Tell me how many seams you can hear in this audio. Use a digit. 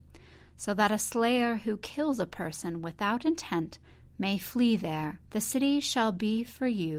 1